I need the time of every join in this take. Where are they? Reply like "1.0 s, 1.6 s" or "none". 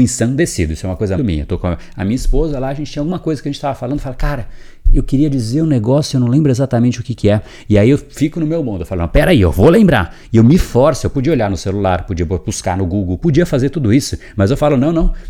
1.2 s